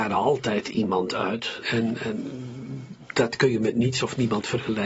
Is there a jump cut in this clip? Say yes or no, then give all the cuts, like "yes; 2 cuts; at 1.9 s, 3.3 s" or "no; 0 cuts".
yes; 1 cut; at 1.6 s